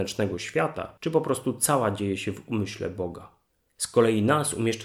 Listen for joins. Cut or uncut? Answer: uncut